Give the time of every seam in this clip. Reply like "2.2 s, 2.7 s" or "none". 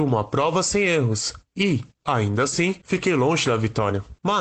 none